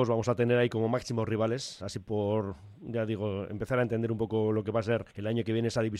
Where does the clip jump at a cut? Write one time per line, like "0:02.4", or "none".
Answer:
none